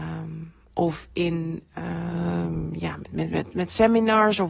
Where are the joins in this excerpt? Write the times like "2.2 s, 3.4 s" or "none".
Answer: none